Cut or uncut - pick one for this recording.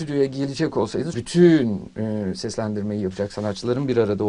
cut